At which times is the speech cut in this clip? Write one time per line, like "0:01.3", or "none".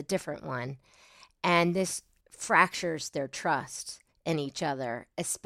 none